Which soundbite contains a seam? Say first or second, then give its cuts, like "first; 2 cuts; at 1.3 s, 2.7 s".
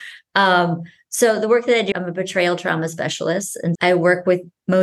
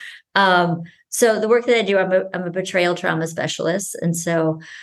first; 2 cuts; at 1.9 s, 3.8 s